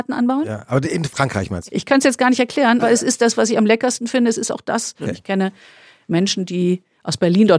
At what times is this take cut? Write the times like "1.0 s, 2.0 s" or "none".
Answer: 1.7 s, 2.8 s, 5.0 s